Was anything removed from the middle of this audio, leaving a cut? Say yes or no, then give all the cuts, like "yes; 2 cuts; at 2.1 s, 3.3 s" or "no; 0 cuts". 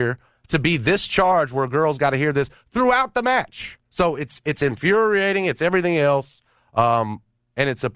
no; 0 cuts